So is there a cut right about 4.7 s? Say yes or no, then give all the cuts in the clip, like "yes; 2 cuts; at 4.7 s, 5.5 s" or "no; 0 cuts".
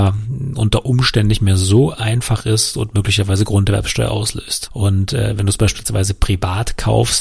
yes; 1 cut; at 4.7 s